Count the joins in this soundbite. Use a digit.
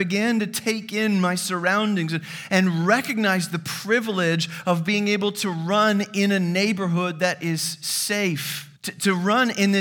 1